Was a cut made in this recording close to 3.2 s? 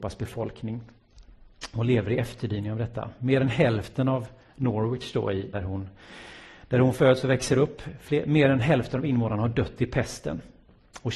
no; 1 cut; at 5.5 s

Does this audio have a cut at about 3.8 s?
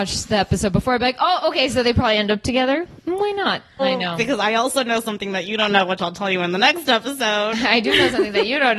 yes; 1 cut; at 3.8 s

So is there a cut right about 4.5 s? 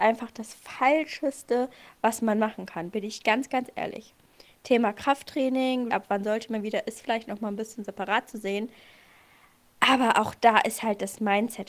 no; 1 cut; at 5.9 s

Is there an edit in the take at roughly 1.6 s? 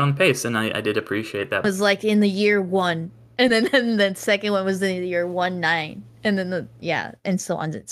yes; 1 cut; at 1.6 s

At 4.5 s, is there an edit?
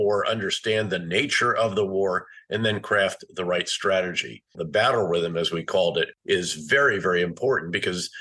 yes; 1 cut; at 4.5 s

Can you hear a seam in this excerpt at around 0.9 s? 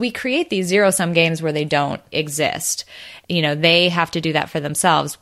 no; 2 cuts; at 2.1 s, 3.2 s

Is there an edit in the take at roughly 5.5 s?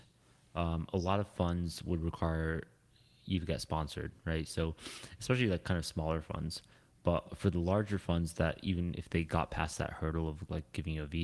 no; 0 cuts

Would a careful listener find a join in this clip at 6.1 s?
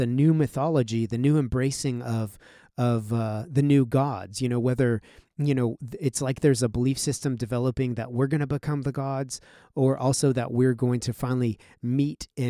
no; 0 cuts

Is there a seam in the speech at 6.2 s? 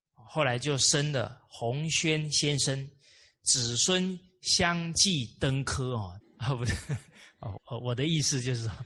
yes; 2 cuts; at 6.2 s, 7.6 s

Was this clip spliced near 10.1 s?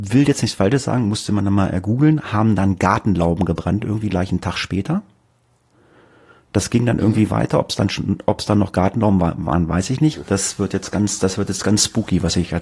yes; 1 cut; at 10.1 s

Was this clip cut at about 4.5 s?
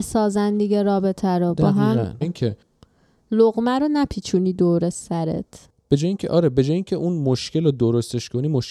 no; 1 cut; at 2.2 s

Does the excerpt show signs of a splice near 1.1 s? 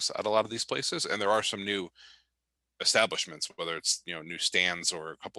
no; 0 cuts

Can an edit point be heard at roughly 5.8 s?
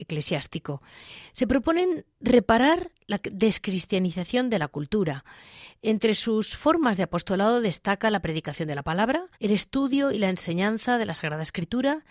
no; 2 cuts; at 1.3 s, 9.3 s

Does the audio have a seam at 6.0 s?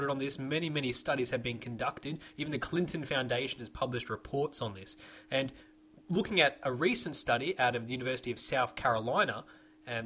no; 0 cuts

